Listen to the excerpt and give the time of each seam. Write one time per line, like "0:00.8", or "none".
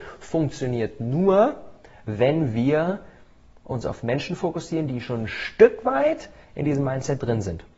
none